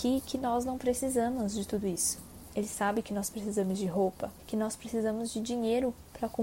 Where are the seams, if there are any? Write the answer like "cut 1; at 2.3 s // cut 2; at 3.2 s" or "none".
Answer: cut 1; at 2.5 s // cut 2; at 4.4 s